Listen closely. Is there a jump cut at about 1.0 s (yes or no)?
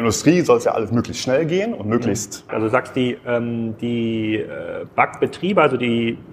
no